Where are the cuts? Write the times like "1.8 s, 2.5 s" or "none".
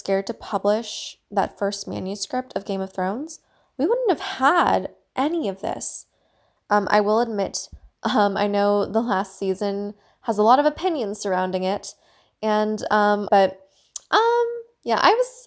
6.6 s, 13.3 s